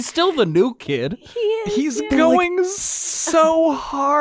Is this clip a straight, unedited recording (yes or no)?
yes